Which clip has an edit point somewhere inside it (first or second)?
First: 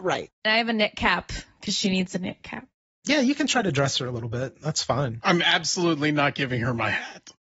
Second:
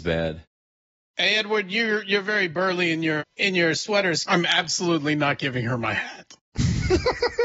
second